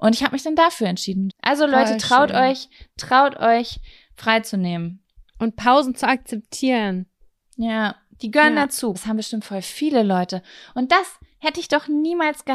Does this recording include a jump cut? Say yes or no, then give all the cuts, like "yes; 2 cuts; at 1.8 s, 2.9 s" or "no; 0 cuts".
yes; 2 cuts; at 1.3 s, 8.9 s